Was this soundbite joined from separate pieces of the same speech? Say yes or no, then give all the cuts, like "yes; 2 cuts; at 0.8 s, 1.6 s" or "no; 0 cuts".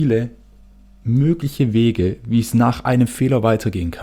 no; 0 cuts